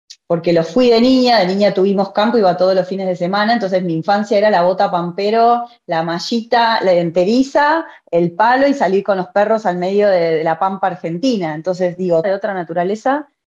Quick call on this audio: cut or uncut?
cut